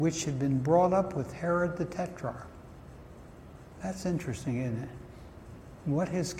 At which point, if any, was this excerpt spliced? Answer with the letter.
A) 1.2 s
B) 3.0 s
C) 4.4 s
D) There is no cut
D